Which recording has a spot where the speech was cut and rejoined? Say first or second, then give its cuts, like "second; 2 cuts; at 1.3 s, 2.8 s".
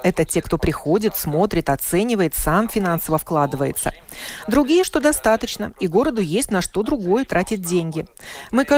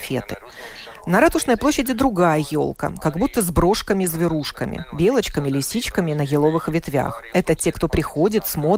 second; 1 cut; at 7.3 s